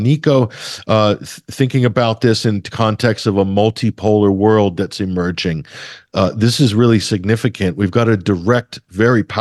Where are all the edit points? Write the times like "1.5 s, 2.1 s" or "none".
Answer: none